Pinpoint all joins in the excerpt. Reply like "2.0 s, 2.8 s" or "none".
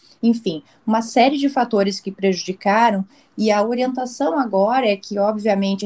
none